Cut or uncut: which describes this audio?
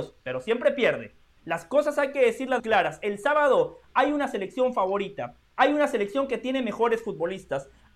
cut